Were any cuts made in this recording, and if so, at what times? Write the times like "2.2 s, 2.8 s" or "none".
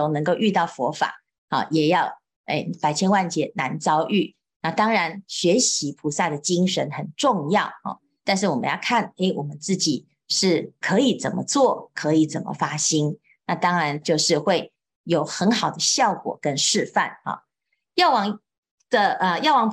14.0 s